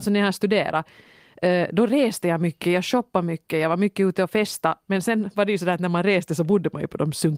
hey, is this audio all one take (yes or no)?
yes